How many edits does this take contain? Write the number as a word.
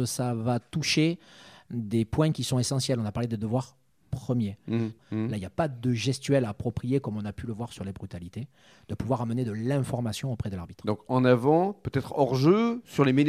one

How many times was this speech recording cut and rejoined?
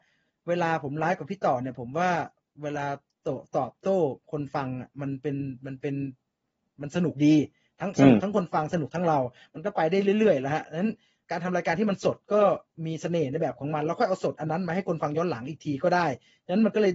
zero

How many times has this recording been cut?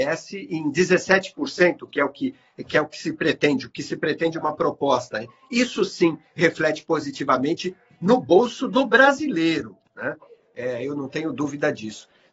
zero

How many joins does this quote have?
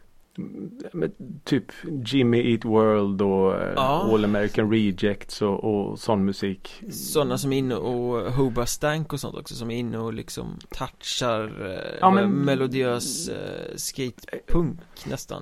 two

